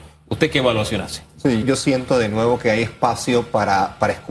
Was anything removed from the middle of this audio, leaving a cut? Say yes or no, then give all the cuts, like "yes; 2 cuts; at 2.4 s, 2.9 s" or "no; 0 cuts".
yes; 1 cut; at 1.6 s